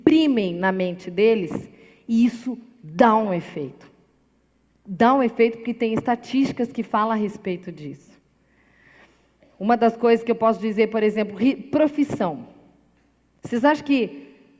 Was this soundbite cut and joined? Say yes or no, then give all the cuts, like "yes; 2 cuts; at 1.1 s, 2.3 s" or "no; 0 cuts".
no; 0 cuts